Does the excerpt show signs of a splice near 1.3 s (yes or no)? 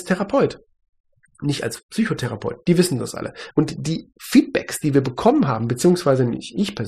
no